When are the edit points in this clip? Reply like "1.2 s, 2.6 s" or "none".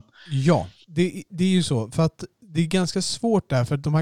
none